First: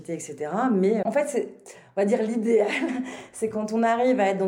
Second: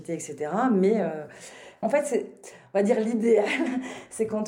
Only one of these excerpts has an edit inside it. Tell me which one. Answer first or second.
first